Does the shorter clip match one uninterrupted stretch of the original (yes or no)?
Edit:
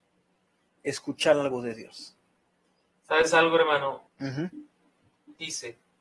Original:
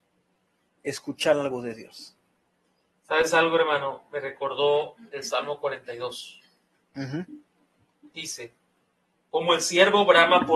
no